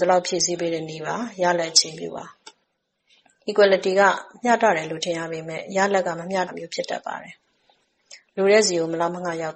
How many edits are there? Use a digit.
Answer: 1